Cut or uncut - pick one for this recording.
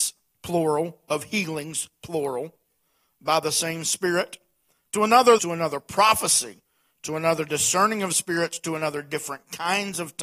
cut